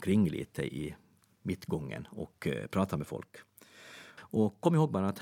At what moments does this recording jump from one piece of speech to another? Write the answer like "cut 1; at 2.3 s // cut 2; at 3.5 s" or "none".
cut 1; at 4.2 s

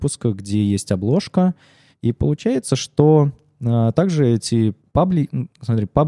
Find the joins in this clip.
cut 1; at 1.9 s // cut 2; at 4.8 s

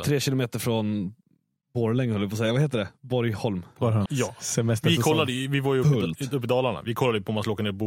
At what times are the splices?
cut 1; at 4.1 s

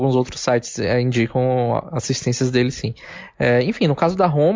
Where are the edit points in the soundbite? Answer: none

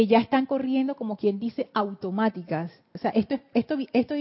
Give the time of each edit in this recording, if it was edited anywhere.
cut 1; at 2.9 s

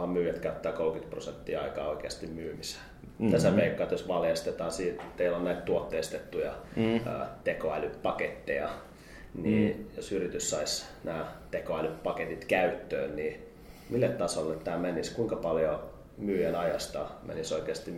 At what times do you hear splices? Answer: none

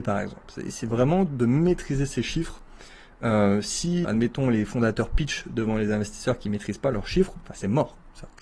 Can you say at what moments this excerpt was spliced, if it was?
cut 1; at 4.0 s

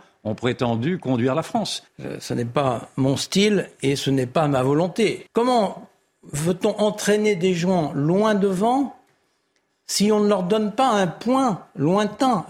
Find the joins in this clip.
cut 1; at 1.9 s // cut 2; at 5.3 s

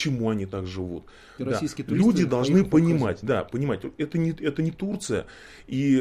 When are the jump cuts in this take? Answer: cut 1; at 1.4 s

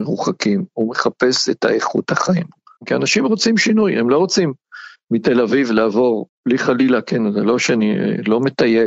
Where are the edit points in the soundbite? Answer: cut 1; at 2.8 s // cut 2; at 6.3 s

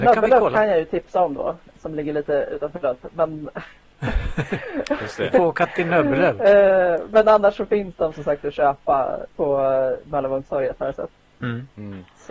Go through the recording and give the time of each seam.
none

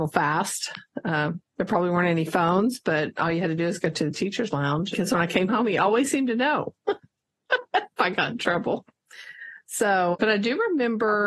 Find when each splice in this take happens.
cut 1; at 4.9 s // cut 2; at 10.1 s

